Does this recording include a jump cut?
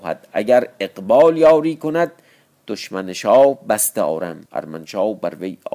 yes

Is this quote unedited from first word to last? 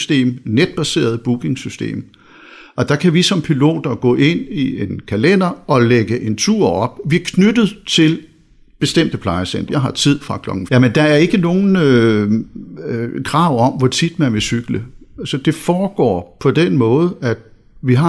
no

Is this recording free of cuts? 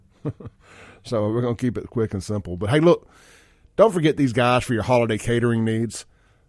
yes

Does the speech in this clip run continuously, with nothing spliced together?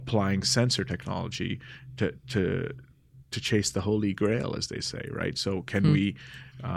yes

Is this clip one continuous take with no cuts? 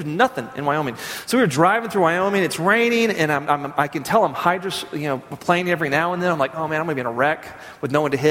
yes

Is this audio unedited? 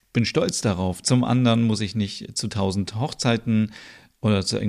no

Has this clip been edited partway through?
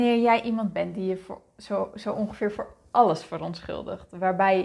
no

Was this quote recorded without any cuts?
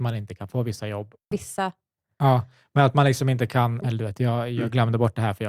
no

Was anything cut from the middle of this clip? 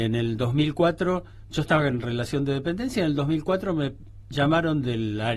no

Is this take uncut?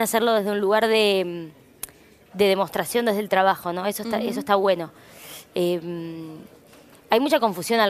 yes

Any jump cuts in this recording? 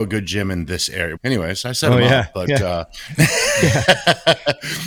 yes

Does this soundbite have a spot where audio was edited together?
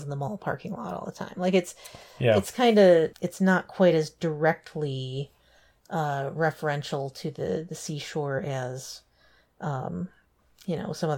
yes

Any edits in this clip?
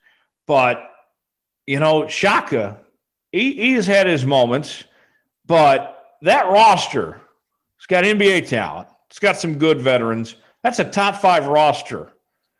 no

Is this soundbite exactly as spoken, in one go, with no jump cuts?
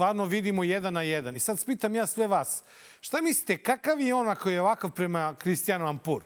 yes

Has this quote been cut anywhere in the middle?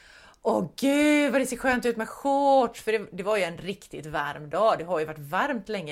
no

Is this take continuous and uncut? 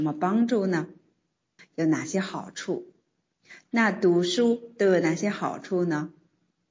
no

